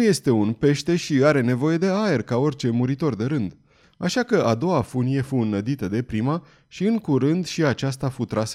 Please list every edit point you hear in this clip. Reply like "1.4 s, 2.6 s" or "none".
3.8 s